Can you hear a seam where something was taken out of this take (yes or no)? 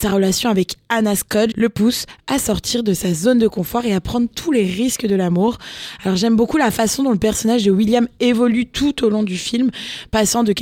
yes